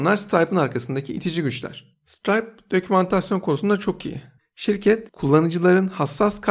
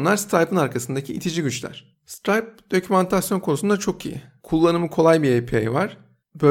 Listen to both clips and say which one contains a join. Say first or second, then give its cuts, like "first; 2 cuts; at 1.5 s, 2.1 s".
first; 1 cut; at 4.4 s